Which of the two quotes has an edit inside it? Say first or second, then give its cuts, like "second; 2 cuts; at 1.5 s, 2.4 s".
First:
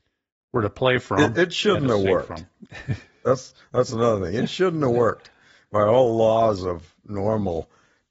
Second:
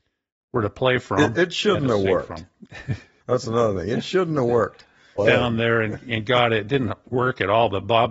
second; 2 cuts; at 3.2 s, 5.2 s